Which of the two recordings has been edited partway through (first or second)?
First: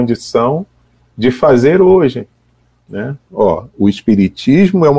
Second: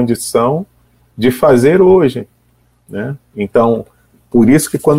first